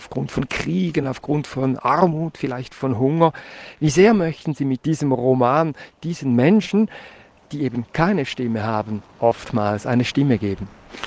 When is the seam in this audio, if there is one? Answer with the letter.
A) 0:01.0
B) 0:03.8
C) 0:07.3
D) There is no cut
D